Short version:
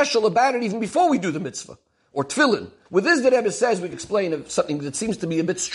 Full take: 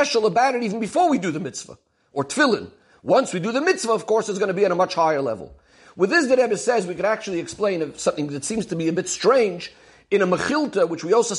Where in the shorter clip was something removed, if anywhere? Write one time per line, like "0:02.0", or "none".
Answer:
0:02.9
0:03.9